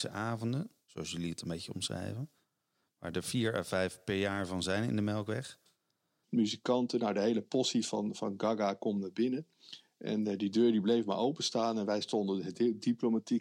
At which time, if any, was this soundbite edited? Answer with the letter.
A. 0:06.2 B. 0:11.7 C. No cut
A